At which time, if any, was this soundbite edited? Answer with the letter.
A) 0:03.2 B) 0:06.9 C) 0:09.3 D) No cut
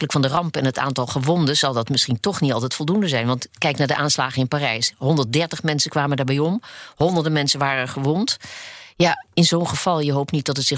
D